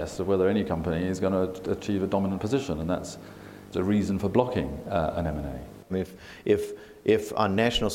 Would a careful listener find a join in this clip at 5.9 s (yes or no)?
yes